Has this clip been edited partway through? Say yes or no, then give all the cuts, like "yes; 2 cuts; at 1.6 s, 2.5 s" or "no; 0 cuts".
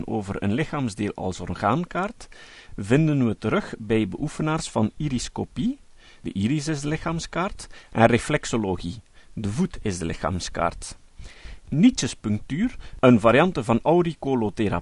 no; 0 cuts